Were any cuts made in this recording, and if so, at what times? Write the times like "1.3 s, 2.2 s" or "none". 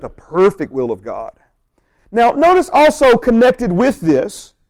2.0 s